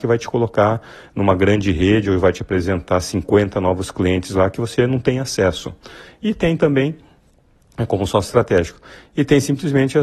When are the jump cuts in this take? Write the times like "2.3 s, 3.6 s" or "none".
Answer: none